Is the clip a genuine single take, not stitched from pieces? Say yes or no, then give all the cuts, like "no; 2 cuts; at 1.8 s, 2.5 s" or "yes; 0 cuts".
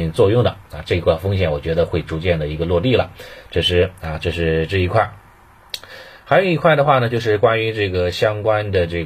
yes; 0 cuts